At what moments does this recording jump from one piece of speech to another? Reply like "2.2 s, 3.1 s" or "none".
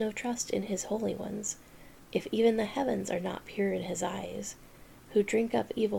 5.0 s